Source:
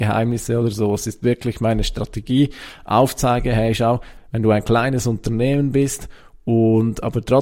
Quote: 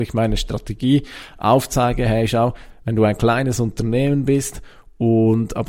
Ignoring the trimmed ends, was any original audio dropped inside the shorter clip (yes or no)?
no